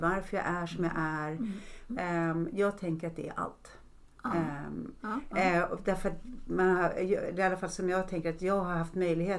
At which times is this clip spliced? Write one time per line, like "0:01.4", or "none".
0:01.9
0:05.0